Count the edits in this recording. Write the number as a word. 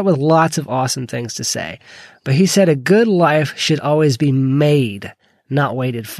zero